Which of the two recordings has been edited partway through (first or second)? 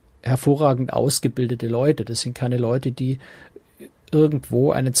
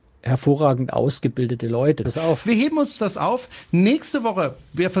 second